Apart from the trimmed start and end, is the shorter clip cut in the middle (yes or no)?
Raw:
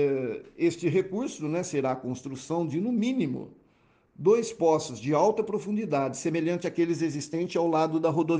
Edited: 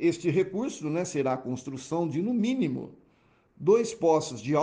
no